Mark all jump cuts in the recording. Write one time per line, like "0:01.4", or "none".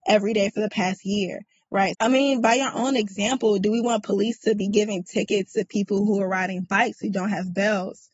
0:01.9